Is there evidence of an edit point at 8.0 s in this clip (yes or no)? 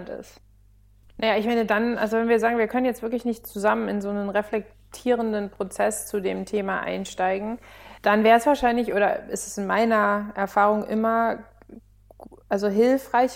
yes